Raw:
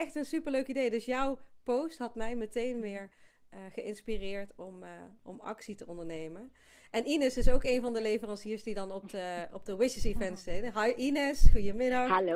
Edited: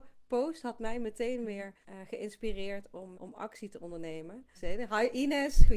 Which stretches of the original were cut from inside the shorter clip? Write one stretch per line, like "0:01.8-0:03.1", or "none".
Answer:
0:03.2-0:03.5
0:04.8-0:05.2
0:06.6-0:10.4